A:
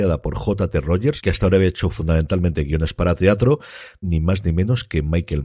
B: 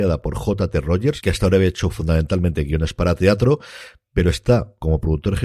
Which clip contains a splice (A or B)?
A